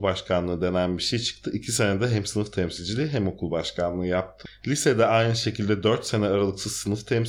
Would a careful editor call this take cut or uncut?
uncut